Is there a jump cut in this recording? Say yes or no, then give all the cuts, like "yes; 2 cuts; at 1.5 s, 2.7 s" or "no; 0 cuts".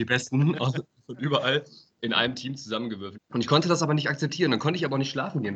yes; 1 cut; at 3.1 s